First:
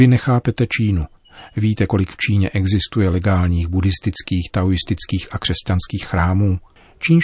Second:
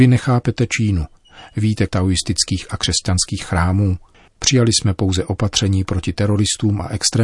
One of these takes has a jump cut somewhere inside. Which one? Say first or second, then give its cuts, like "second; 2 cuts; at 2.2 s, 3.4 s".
second; 2 cuts; at 1.9 s, 4.3 s